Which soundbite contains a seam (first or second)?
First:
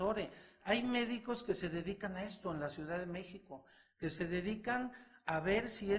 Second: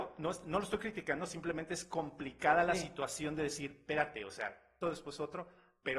second